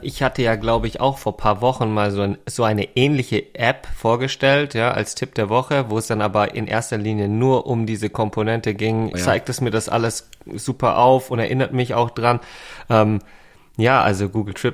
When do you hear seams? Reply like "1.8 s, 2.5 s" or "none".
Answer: 9.1 s